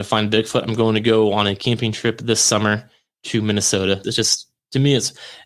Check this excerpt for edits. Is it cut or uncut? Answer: cut